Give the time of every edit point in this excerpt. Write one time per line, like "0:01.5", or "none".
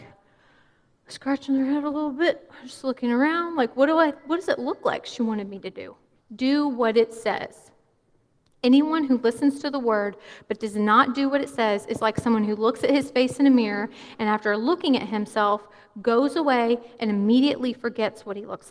0:06.1